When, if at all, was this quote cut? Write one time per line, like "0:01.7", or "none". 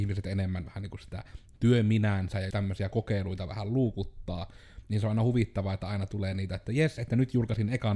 0:02.5